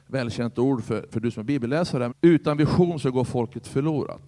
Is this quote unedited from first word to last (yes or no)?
no